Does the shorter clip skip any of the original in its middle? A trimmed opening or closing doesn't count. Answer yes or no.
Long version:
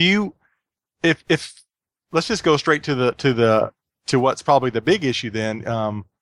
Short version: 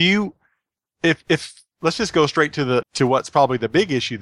yes